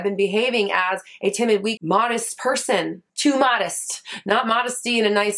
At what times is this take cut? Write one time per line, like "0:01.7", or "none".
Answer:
0:01.8
0:03.1